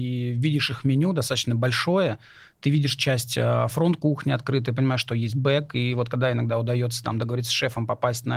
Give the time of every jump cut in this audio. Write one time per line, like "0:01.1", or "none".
none